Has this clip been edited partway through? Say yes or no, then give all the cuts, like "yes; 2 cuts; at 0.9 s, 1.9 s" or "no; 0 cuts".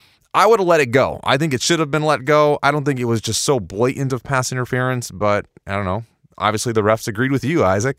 no; 0 cuts